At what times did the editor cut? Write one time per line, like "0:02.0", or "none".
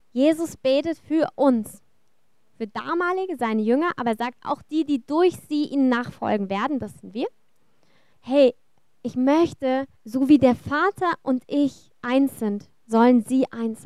0:08.1
0:10.0